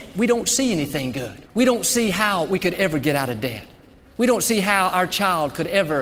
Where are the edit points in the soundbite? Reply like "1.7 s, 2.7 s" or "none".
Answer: 1.5 s